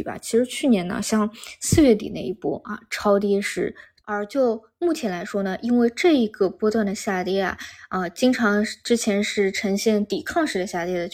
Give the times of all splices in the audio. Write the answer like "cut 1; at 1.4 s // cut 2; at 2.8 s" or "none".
cut 1; at 4.0 s